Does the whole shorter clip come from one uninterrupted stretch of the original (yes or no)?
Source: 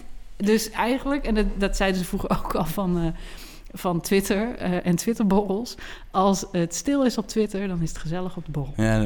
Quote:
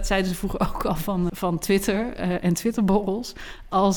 no